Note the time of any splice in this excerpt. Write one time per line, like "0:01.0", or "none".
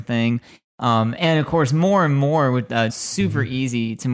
0:02.9